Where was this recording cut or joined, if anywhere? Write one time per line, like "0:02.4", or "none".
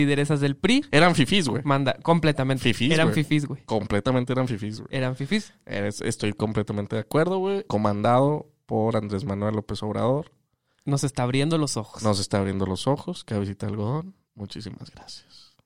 0:07.7

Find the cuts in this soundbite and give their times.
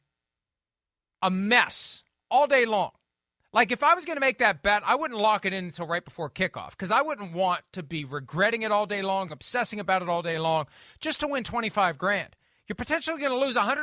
0:09.3

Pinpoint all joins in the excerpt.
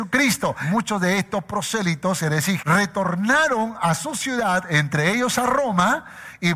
0:02.6

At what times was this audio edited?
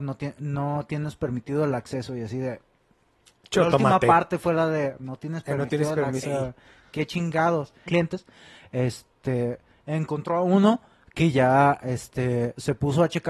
0:06.2
0:07.9

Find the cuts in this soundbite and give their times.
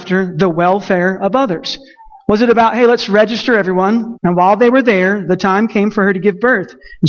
0:04.1

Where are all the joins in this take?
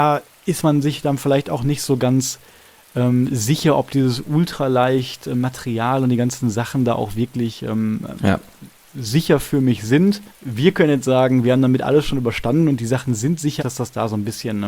0:10.3
0:13.6

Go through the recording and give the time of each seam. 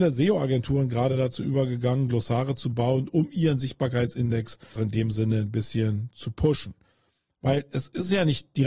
0:04.8

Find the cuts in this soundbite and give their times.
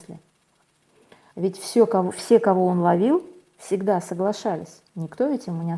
0:01.3

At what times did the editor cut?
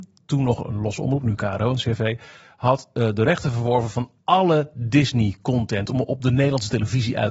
none

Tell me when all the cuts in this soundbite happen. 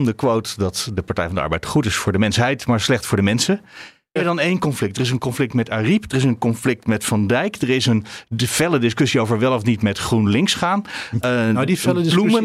0:04.2

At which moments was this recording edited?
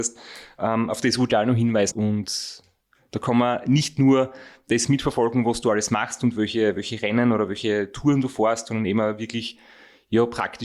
0:01.9

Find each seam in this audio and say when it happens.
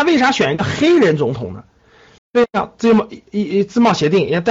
0:02.2

